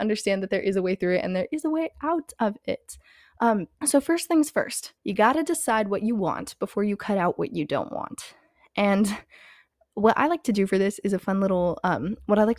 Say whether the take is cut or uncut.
cut